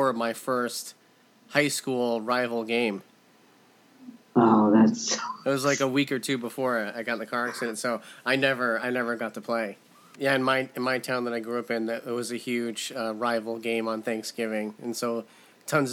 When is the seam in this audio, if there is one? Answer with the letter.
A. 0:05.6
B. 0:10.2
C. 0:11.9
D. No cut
B